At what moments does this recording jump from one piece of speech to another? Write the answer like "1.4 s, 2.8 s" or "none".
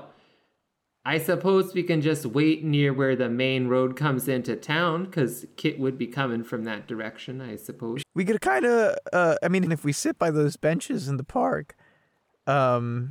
8.0 s, 9.7 s